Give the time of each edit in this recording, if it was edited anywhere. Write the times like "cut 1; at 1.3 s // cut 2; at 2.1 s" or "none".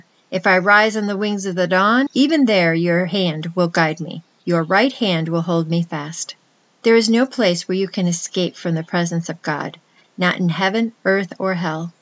cut 1; at 2.1 s